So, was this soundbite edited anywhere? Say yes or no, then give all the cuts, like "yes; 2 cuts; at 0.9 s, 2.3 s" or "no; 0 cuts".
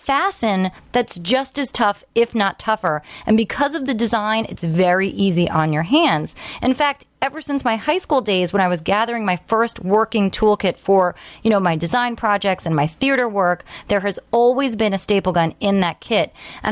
no; 0 cuts